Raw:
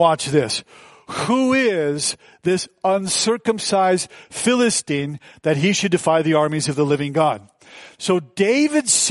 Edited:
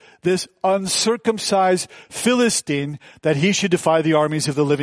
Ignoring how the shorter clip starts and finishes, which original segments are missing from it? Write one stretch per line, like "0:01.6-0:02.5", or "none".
none

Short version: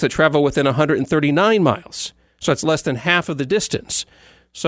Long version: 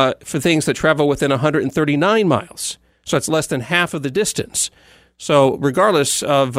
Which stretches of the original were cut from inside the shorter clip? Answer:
none

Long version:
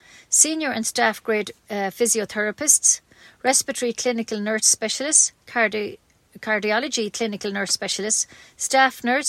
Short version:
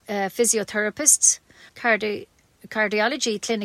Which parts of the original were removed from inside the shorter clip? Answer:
0:03.3-0:05.4

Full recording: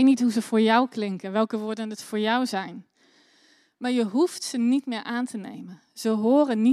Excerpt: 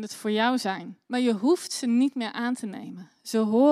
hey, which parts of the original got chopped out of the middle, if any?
0:02.9-0:03.8

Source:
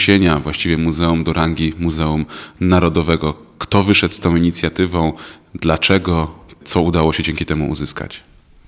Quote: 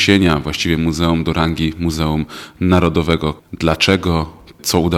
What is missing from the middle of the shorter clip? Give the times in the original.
0:03.4-0:05.4

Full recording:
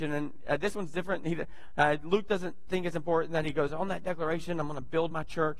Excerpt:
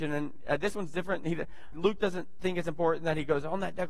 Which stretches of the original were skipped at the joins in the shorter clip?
0:01.7-0:02.0

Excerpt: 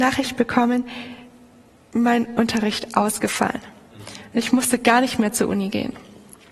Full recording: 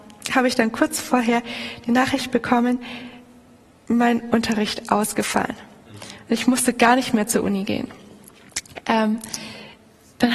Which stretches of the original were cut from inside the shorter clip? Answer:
none

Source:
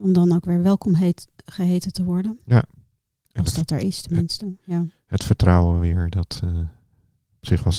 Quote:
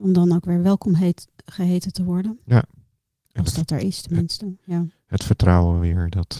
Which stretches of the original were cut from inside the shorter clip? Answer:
none

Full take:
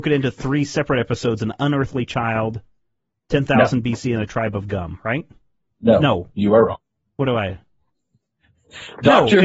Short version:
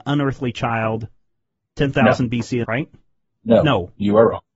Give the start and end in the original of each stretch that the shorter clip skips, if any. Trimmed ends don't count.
0:04.2-0:05.0

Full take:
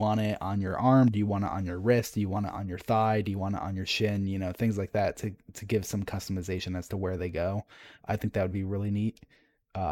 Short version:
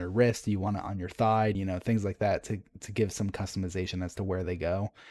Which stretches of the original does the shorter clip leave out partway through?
0:03.2-0:04.3

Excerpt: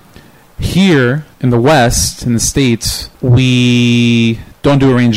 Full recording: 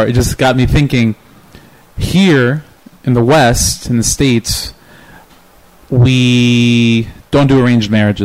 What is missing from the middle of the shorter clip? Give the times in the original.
0:02.7-0:03.0
0:04.8-0:05.8

